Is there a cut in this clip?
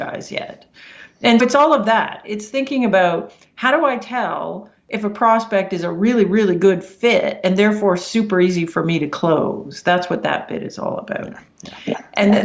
yes; 1 cut; at 1.4 s

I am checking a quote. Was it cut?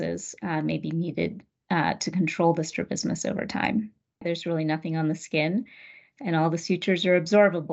yes; 1 cut; at 4.2 s

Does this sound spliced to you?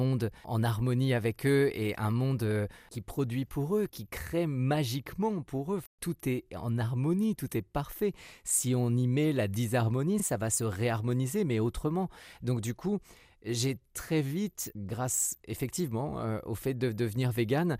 no; 0 cuts

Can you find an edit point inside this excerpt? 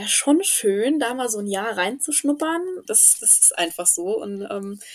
yes; 1 cut; at 2.8 s

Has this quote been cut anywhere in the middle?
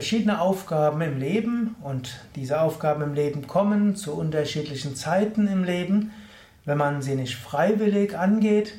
no; 0 cuts

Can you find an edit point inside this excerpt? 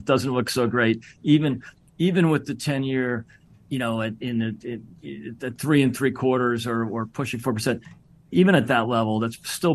no; 0 cuts

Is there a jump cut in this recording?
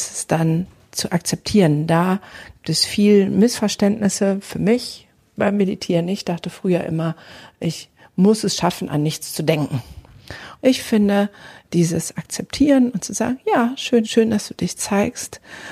yes; 2 cuts; at 10.6 s, 14.0 s

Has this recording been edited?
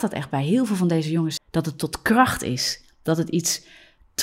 yes; 1 cut; at 1.4 s

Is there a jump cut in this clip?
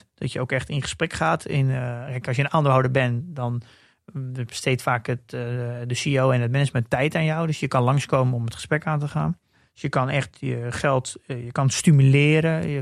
no; 0 cuts

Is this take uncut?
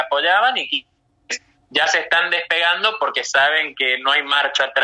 yes; 0 cuts

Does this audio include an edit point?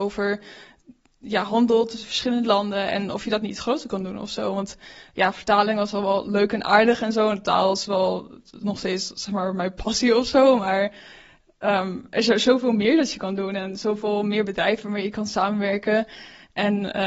no; 0 cuts

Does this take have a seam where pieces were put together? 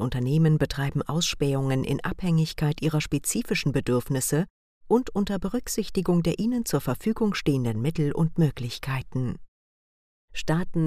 no; 0 cuts

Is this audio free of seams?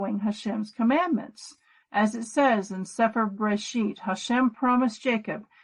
no; 1 cut; at 1.8 s

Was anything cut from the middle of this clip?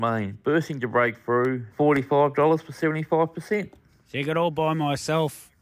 yes; 1 cut; at 1.7 s

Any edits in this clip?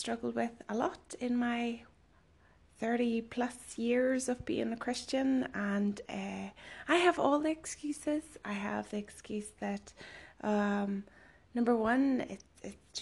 no; 0 cuts

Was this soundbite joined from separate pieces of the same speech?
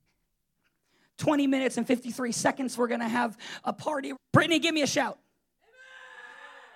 yes; 2 cuts; at 2.8 s, 4.1 s

